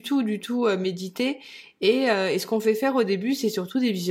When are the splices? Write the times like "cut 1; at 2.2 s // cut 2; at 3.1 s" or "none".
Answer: none